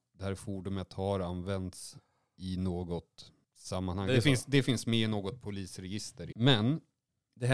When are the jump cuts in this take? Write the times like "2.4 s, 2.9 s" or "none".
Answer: 6.3 s